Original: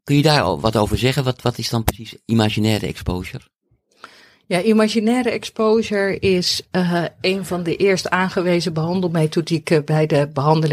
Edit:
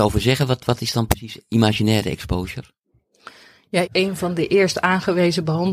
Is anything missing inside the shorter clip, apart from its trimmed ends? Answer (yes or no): yes